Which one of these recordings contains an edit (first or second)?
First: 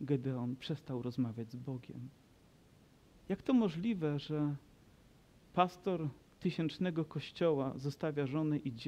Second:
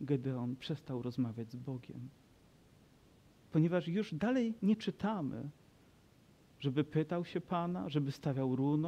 first